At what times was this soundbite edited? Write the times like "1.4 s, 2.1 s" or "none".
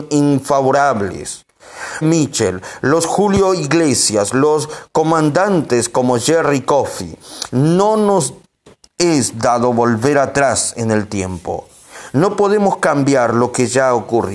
2.0 s, 7.5 s